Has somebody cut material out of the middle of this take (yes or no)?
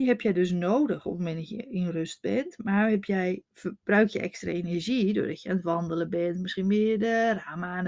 yes